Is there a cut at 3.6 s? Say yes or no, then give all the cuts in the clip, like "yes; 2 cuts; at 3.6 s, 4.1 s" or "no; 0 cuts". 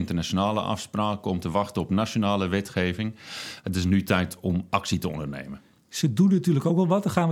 yes; 1 cut; at 3.6 s